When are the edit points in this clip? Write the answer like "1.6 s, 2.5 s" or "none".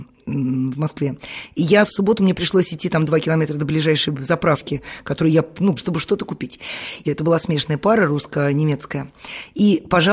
5.8 s, 7.0 s